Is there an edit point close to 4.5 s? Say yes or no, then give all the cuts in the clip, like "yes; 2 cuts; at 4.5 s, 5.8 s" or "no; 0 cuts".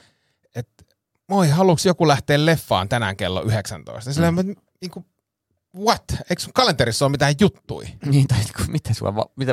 no; 0 cuts